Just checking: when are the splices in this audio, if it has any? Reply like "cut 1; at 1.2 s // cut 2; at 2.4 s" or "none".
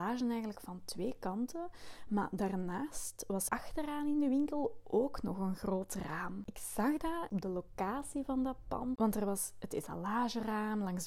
cut 1; at 3.5 s // cut 2; at 7.3 s // cut 3; at 9.0 s